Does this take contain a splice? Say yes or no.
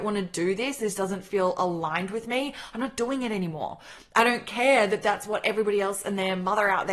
no